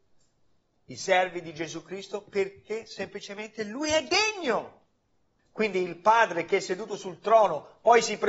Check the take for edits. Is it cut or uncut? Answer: cut